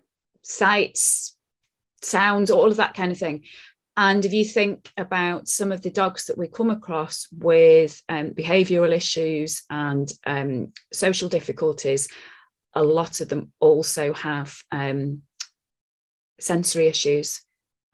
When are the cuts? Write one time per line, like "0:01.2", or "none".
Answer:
none